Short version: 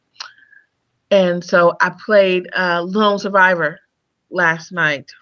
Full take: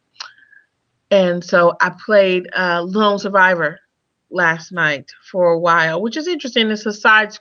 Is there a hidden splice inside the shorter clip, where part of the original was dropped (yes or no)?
no